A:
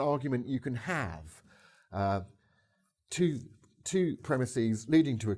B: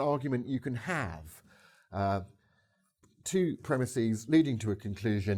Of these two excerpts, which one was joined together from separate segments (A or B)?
B